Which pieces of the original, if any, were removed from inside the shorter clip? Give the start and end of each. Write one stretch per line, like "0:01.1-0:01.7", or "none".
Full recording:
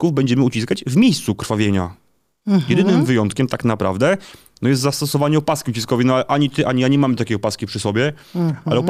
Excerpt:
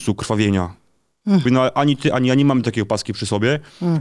0:02.7-0:06.0